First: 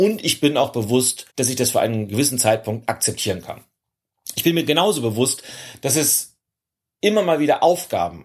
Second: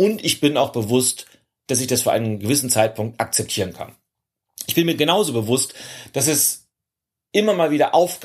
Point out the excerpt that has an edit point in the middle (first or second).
first